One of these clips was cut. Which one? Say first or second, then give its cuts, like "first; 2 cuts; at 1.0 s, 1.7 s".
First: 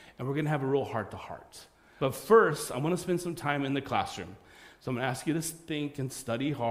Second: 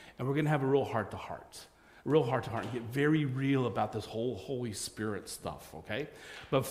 first; 1 cut; at 2.0 s